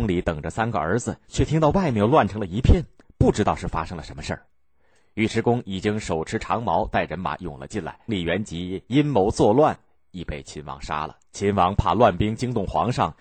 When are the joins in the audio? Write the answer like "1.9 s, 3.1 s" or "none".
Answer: 8.1 s, 11.3 s